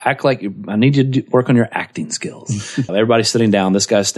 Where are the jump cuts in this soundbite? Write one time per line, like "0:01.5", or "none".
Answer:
0:02.9